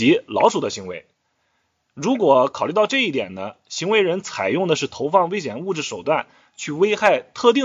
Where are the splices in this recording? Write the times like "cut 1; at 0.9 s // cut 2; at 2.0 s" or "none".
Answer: none